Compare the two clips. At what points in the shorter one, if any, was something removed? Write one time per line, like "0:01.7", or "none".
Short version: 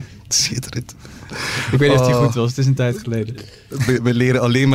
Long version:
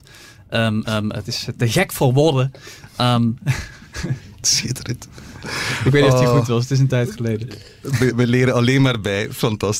none